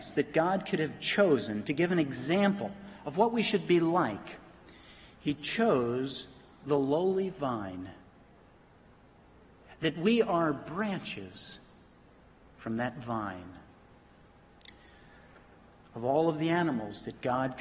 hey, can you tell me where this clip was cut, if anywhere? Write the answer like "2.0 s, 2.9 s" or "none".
none